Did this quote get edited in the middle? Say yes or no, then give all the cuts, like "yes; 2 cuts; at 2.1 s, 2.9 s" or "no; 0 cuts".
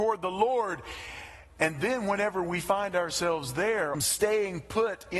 yes; 1 cut; at 3.9 s